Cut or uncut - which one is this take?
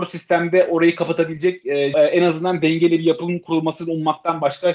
cut